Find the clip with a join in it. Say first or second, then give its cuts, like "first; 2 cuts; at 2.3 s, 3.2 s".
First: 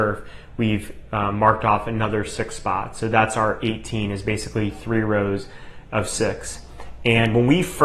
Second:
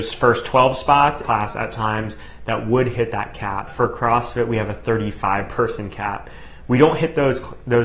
second; 2 cuts; at 1.2 s, 3.7 s